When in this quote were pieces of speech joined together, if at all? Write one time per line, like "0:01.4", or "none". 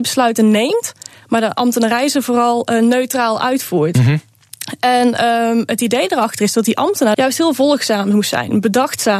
0:07.1